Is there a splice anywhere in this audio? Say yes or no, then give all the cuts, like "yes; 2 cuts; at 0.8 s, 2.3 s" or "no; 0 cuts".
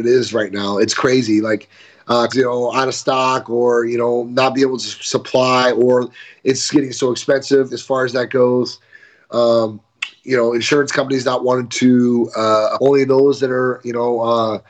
yes; 2 cuts; at 2.3 s, 12.8 s